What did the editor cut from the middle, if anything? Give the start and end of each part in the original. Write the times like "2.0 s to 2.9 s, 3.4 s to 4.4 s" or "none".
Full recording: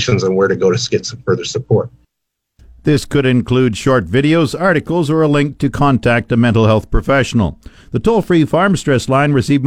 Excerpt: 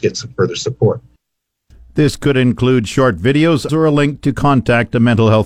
4.6 s to 5.1 s